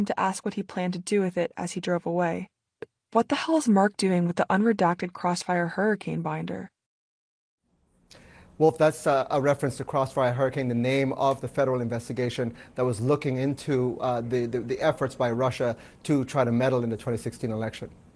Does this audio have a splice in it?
no; 0 cuts

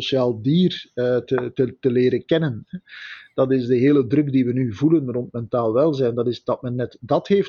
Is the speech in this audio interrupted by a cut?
no; 0 cuts

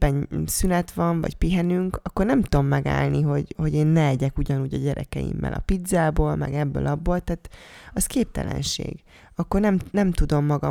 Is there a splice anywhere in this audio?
no; 0 cuts

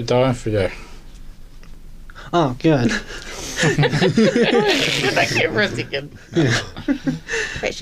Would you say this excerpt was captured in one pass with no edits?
yes; 0 cuts

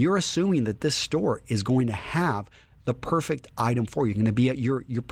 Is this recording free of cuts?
yes; 0 cuts

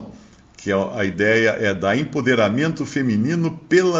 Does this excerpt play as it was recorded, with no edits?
yes; 0 cuts

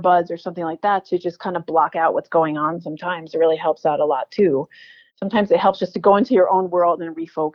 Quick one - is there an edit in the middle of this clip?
yes; 1 cut; at 5.1 s

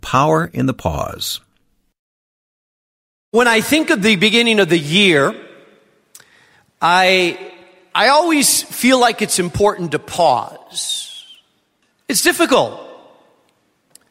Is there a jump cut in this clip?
yes; 1 cut; at 11.9 s

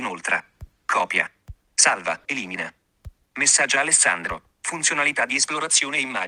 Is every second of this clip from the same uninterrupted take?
no; 1 cut; at 2.2 s

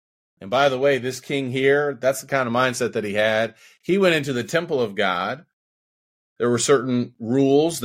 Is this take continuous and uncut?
yes; 0 cuts

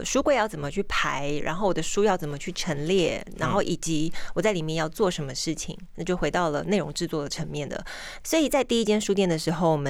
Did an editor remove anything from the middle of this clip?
yes; 1 cut; at 8.2 s

